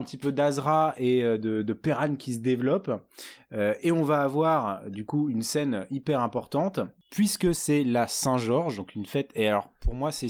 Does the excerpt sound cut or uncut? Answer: uncut